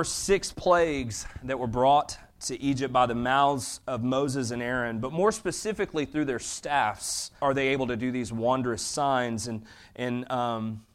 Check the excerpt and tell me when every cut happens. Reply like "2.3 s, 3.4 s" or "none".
7.4 s